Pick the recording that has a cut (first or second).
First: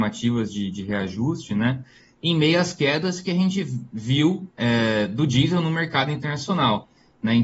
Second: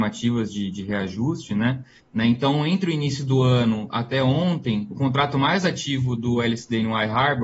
second